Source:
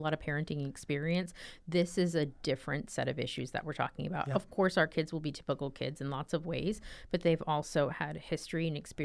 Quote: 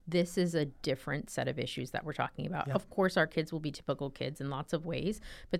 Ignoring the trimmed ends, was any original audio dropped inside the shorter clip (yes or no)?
no